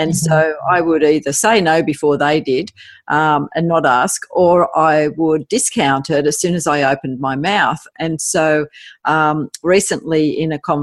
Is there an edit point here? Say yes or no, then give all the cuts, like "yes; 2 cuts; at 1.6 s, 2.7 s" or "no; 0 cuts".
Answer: no; 0 cuts